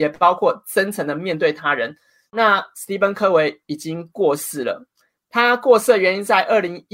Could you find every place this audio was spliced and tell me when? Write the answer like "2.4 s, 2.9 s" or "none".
2.3 s